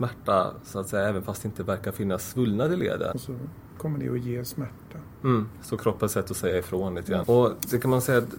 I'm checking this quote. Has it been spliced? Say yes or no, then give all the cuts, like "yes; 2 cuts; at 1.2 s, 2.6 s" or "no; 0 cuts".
yes; 2 cuts; at 3.1 s, 7.2 s